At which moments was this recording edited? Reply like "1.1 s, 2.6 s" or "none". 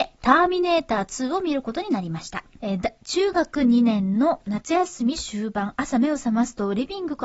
2.6 s